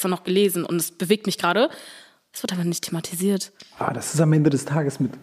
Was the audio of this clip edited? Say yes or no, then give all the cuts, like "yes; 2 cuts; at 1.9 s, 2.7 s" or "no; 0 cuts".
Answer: no; 0 cuts